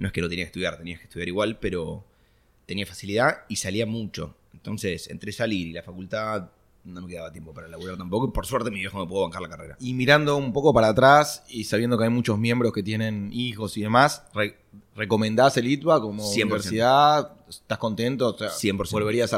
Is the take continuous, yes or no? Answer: yes